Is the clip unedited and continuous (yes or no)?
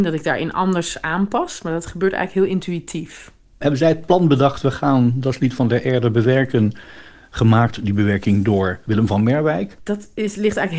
no